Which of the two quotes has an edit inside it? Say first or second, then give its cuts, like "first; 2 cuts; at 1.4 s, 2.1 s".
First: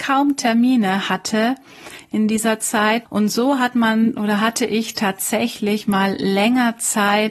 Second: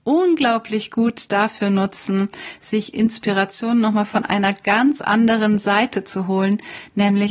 first; 1 cut; at 3.1 s